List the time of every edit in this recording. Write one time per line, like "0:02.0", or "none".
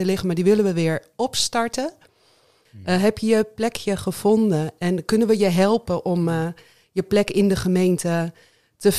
0:02.7